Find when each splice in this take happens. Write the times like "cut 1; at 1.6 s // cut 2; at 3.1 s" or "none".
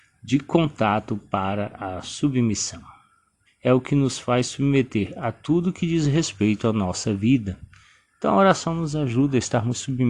cut 1; at 3.5 s